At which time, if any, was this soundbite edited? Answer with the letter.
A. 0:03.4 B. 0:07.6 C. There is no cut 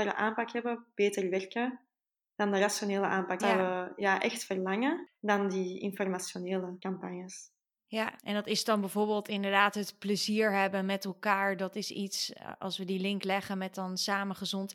A